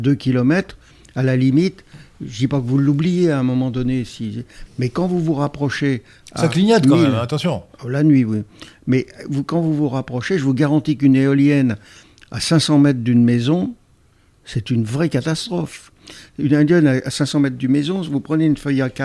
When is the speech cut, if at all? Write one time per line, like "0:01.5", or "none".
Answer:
0:04.7